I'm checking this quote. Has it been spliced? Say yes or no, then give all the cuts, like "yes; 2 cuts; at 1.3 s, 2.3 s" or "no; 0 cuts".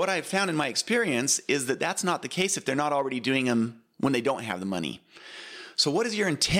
no; 0 cuts